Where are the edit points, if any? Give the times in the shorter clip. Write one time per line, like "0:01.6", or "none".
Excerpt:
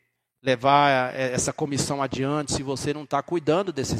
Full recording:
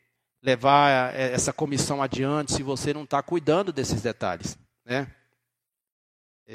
none